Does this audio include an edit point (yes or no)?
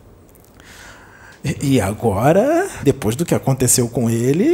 yes